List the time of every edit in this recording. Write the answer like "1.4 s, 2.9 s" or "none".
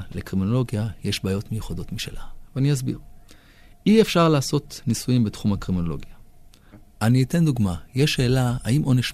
none

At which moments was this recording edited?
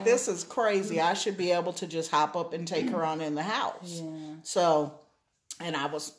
none

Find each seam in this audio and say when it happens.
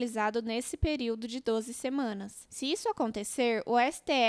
none

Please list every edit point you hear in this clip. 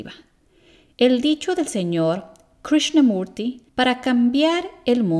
0.9 s, 3.7 s

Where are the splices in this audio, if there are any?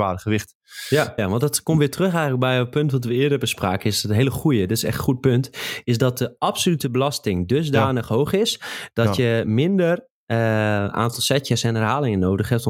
1.2 s

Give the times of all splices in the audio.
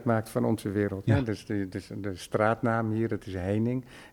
1.1 s

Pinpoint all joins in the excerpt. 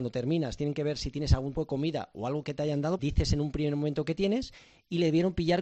1.5 s, 3.0 s

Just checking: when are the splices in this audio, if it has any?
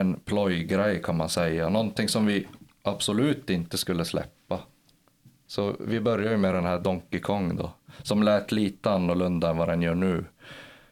5.5 s

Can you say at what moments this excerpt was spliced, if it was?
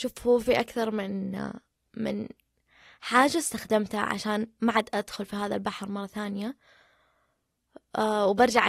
none

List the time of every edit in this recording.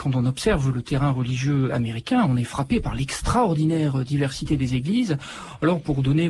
none

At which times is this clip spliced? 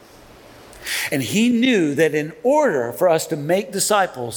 none

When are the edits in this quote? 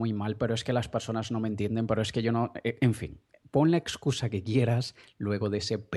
none

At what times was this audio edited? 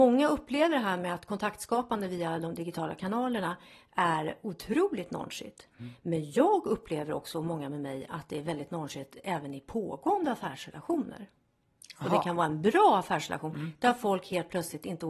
none

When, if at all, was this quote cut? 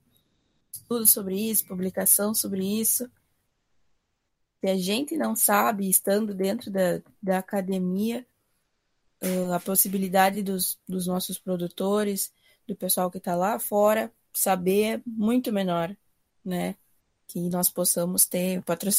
none

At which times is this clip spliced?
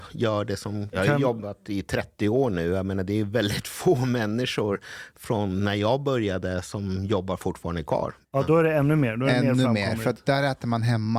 0.9 s, 8.2 s

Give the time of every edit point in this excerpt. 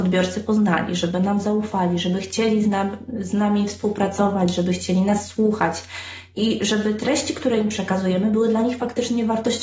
none

